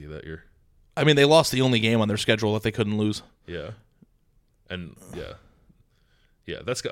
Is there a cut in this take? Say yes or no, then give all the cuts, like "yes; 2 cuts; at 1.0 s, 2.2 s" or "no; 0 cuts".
no; 0 cuts